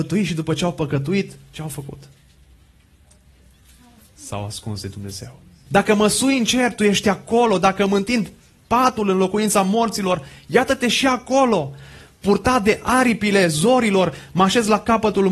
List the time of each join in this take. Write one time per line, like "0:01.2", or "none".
0:05.7